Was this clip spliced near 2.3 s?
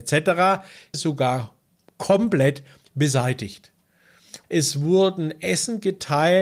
no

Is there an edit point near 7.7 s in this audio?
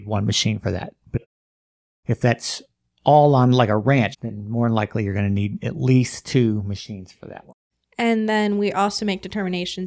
no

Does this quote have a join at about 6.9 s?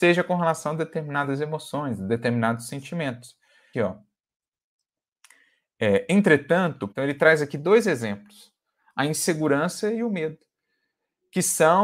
yes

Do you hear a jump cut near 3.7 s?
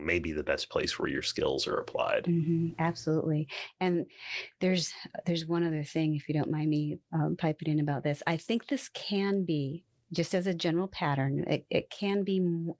no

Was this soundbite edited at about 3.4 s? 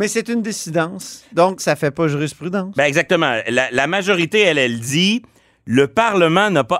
no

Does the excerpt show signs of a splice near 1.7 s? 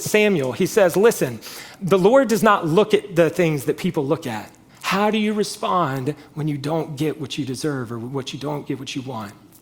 yes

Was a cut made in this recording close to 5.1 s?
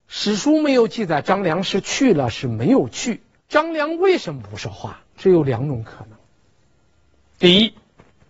yes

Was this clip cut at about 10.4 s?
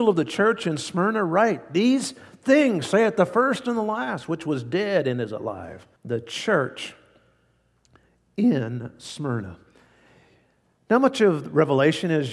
no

